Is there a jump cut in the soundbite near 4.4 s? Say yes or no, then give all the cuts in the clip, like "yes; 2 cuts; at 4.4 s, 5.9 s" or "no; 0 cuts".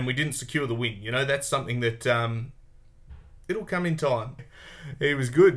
yes; 1 cut; at 4.4 s